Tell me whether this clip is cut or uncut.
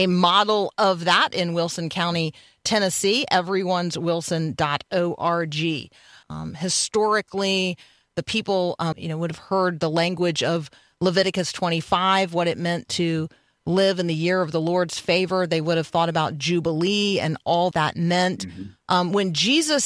cut